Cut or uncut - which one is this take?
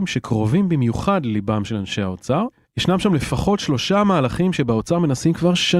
uncut